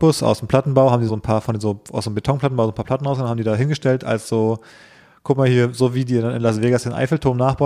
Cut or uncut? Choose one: cut